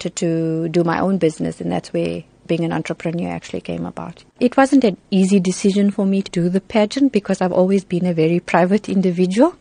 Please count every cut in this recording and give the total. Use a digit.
2